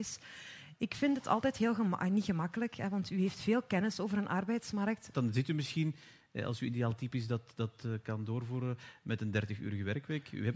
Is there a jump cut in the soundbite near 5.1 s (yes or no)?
yes